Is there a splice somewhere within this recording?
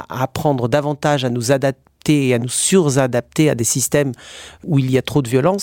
no; 0 cuts

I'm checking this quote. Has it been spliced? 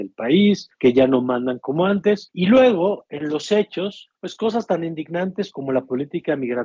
no; 0 cuts

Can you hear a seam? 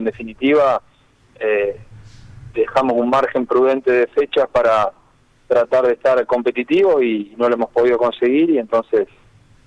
no; 0 cuts

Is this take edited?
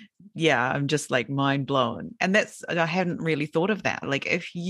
no; 0 cuts

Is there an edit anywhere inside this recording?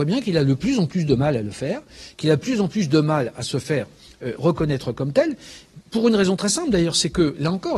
no; 0 cuts

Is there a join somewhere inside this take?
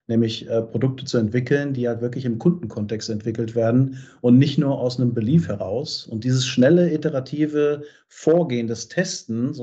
no; 0 cuts

